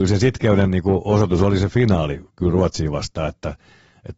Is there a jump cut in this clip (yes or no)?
no